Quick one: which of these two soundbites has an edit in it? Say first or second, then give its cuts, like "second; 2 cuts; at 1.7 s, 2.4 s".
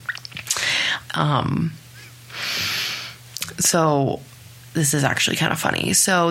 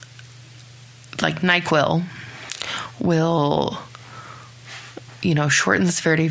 first; 1 cut; at 1.1 s